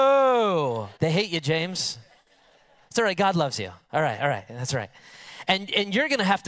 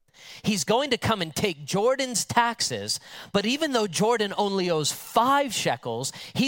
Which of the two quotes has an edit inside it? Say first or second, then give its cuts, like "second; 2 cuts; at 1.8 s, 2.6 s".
first; 1 cut; at 1.0 s